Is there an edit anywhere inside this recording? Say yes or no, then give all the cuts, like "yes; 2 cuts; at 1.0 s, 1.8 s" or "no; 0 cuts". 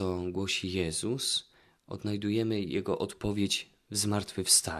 no; 0 cuts